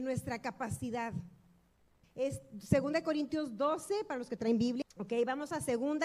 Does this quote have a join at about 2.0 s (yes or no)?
yes